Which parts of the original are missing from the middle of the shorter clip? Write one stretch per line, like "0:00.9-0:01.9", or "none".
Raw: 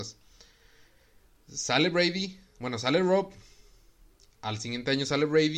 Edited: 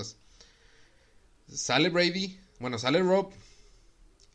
none